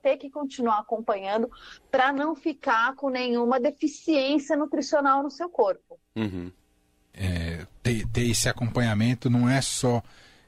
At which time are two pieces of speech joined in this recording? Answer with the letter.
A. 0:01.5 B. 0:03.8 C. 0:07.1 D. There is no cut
C